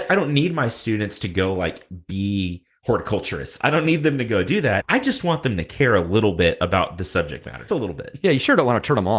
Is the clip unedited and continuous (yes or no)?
no